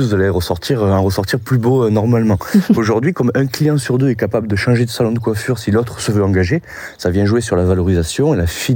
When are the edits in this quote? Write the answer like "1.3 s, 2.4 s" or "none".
2.7 s